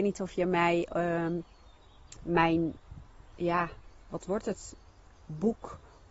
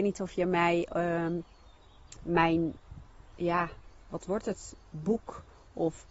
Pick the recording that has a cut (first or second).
second